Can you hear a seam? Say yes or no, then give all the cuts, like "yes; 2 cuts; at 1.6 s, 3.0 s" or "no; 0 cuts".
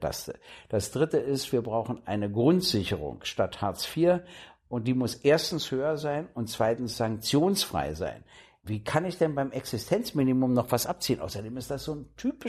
yes; 1 cut; at 8.6 s